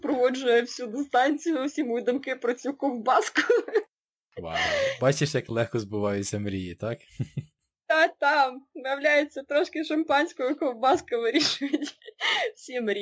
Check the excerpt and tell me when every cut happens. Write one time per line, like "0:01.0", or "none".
none